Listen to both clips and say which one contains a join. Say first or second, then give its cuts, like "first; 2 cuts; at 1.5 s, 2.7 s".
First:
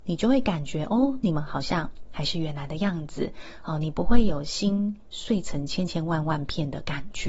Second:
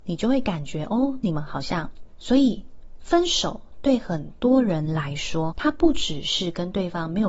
second; 2 cuts; at 2.1 s, 5.5 s